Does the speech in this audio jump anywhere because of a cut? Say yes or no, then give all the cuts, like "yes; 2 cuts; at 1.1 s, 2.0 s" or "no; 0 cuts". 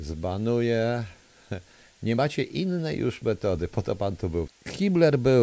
yes; 1 cut; at 4.5 s